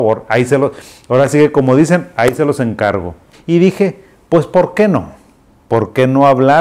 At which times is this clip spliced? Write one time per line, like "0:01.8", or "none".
0:03.3